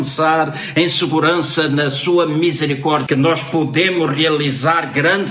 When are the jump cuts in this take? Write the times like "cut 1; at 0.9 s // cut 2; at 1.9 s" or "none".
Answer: cut 1; at 3.1 s